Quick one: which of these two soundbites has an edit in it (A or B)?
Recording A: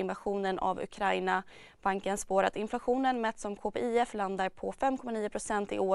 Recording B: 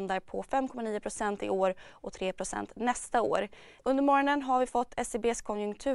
B